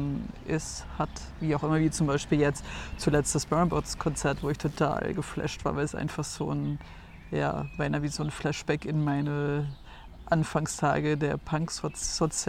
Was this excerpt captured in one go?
yes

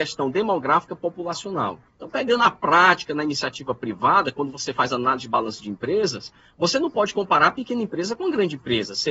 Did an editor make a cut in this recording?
yes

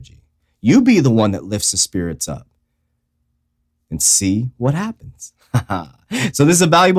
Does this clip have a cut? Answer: no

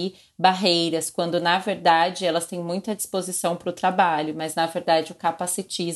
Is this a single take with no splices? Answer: yes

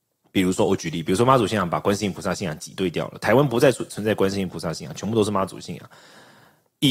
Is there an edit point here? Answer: no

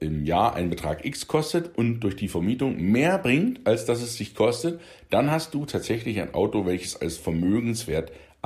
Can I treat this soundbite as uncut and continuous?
yes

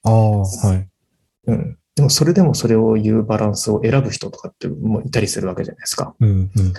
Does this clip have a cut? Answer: no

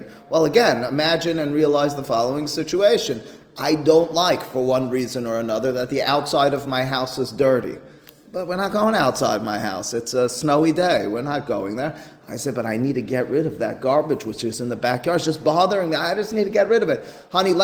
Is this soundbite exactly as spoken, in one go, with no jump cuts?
yes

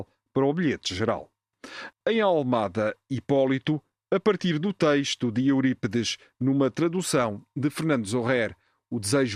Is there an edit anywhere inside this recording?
no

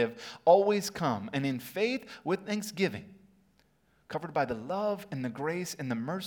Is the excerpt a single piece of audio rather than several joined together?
yes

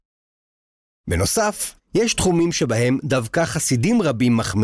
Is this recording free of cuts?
no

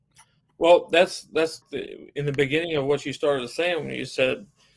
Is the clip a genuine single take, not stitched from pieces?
no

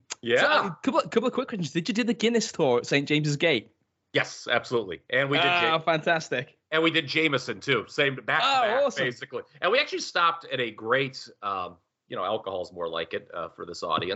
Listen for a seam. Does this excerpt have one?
no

